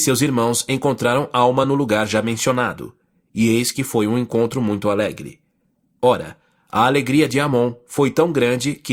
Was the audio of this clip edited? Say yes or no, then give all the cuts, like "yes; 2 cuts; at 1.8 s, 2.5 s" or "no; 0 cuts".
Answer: no; 0 cuts